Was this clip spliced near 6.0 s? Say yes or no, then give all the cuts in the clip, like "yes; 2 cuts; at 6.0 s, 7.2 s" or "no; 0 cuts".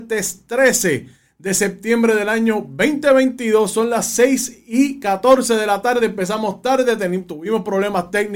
no; 0 cuts